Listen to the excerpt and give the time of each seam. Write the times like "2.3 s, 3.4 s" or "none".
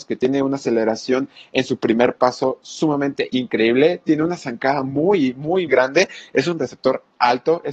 5.7 s